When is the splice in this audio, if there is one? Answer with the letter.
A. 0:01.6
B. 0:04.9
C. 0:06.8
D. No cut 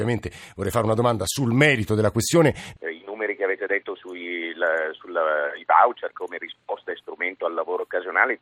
D